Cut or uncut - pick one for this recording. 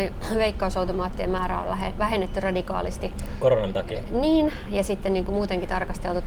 uncut